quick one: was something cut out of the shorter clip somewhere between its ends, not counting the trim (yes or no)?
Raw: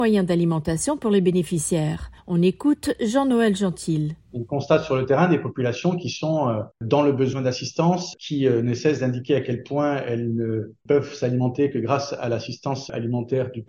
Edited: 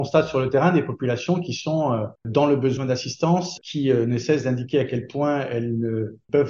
no